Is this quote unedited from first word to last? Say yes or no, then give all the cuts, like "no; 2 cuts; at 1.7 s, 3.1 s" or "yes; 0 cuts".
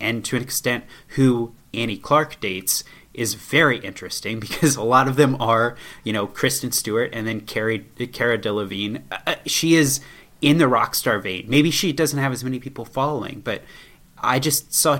yes; 0 cuts